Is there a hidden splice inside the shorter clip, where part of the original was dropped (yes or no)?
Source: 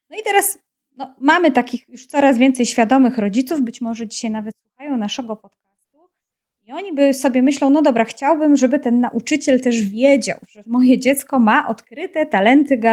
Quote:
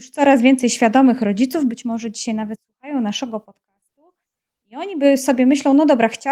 no